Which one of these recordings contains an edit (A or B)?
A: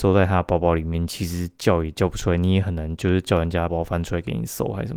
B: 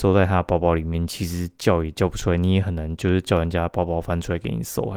A